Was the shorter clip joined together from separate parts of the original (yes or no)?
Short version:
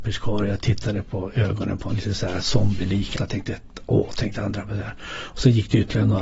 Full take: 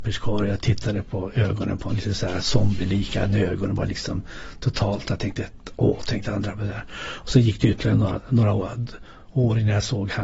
yes